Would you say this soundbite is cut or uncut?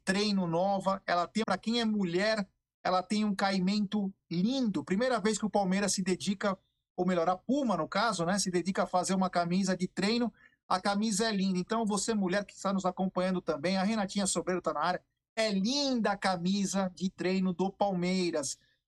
cut